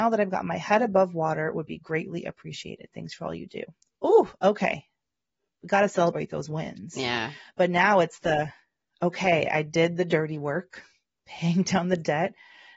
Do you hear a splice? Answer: no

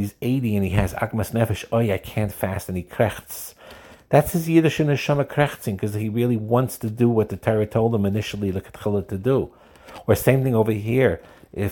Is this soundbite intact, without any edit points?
yes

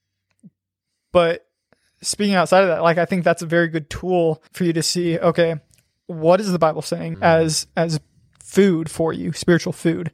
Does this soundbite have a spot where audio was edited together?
yes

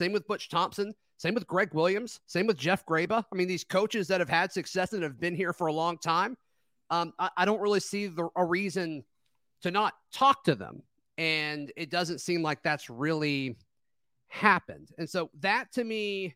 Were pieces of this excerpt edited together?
no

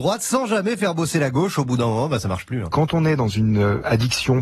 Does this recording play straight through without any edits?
no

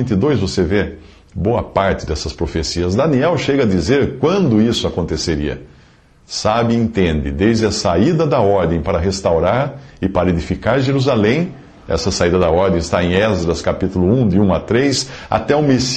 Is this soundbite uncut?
yes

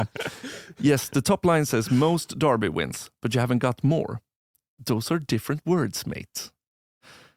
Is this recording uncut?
yes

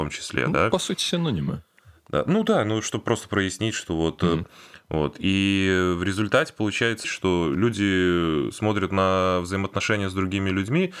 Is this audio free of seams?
no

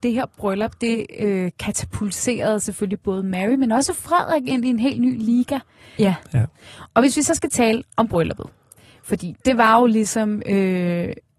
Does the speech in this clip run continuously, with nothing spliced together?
no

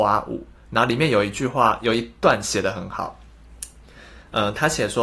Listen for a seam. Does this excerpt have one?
no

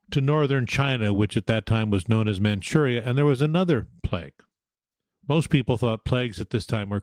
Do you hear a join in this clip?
no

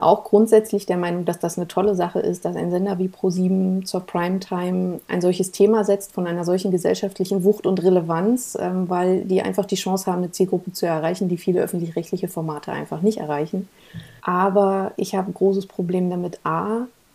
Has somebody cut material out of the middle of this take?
yes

